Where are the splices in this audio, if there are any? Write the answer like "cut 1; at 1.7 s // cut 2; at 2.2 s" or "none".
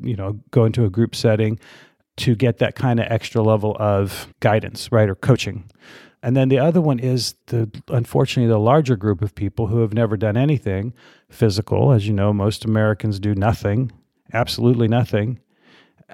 cut 1; at 4.3 s